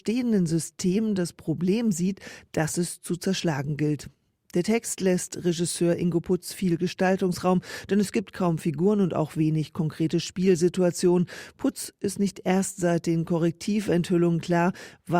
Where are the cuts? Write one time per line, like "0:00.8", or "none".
none